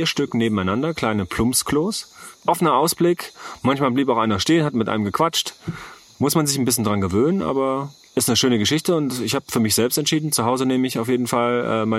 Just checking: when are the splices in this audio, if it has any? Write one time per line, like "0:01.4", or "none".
none